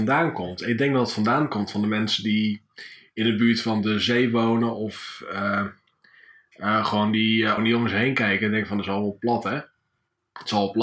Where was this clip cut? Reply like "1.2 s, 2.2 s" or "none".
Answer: 7.6 s